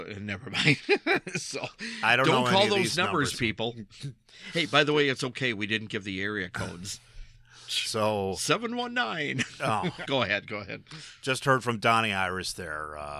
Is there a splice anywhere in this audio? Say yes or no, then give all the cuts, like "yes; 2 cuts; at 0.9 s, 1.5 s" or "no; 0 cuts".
yes; 1 cut; at 10.0 s